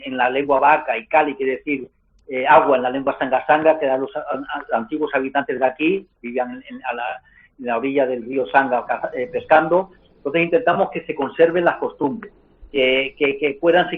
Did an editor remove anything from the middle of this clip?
yes; 1 cut; at 6.1 s

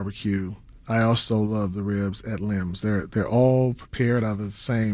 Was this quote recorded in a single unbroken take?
yes; 0 cuts

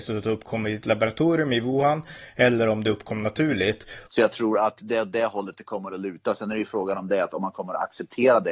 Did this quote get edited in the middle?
yes; 1 cut; at 4.1 s

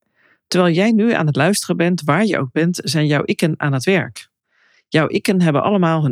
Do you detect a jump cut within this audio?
no; 0 cuts

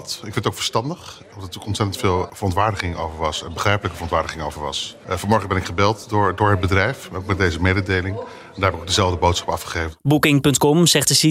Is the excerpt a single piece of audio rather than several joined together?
yes; 0 cuts

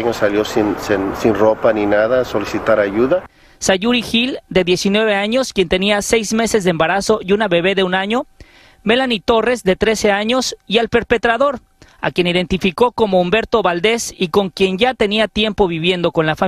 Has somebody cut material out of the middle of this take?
no; 0 cuts

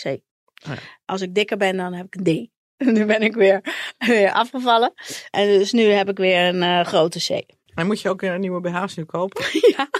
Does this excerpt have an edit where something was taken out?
no; 0 cuts

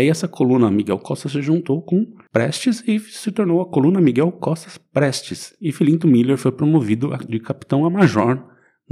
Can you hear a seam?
no; 0 cuts

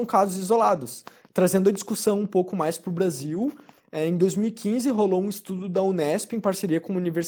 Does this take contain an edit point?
no; 0 cuts

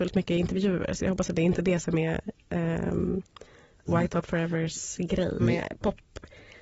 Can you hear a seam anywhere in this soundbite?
yes; 1 cut; at 5.4 s

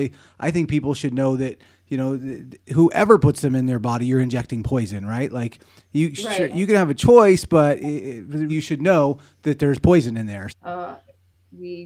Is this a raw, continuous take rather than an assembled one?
no; 2 cuts; at 8.5 s, 10.5 s

